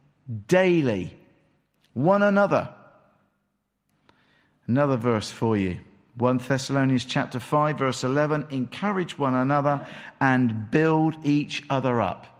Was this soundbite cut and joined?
no; 0 cuts

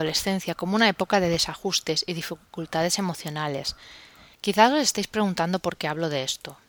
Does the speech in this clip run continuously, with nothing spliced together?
no; 1 cut; at 4.4 s

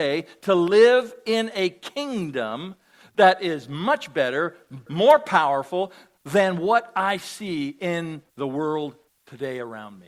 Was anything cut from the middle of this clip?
yes; 1 cut; at 4.9 s

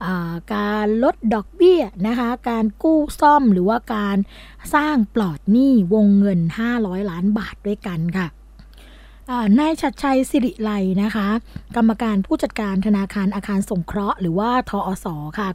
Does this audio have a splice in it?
no; 0 cuts

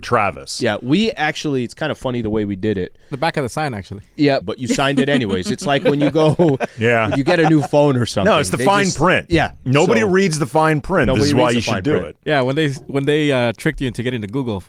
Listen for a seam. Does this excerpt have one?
yes; 1 cut; at 4.4 s

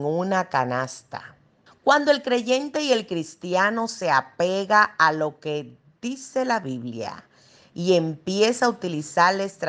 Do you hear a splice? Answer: yes; 1 cut; at 1.7 s

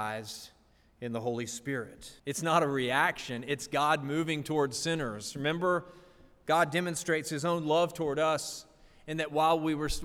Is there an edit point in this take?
yes; 1 cut; at 2.2 s

